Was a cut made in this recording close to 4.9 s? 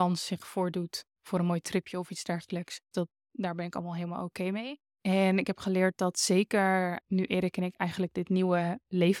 yes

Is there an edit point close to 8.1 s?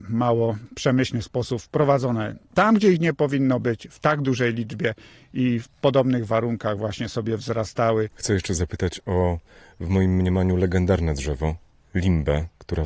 no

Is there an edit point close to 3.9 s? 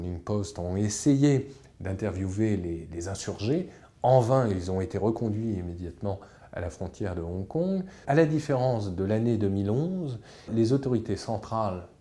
no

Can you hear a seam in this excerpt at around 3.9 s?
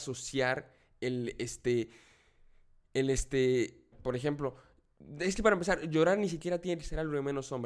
yes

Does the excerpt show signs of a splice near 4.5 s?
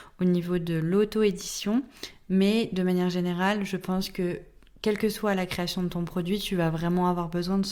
no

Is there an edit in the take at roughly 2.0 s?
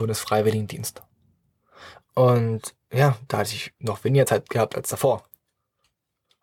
yes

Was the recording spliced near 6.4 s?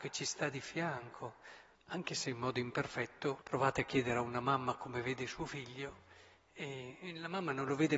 no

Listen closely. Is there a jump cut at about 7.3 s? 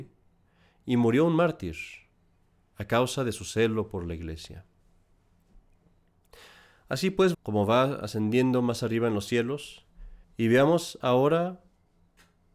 yes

